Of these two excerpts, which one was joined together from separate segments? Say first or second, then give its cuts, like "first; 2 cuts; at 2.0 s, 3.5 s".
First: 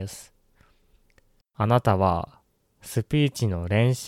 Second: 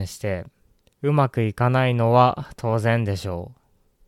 first; 1 cut; at 1.4 s